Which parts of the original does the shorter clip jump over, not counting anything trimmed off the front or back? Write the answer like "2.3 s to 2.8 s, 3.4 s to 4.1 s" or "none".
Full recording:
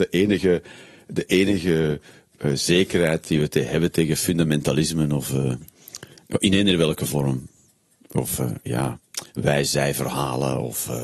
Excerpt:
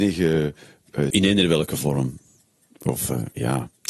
2.6 s to 6.4 s